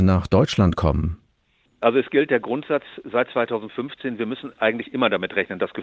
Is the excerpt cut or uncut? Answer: uncut